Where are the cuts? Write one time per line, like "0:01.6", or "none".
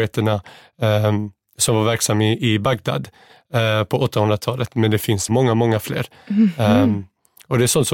0:05.3